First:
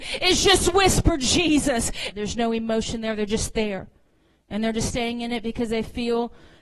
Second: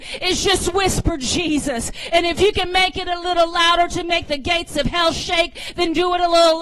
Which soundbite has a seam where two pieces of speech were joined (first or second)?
first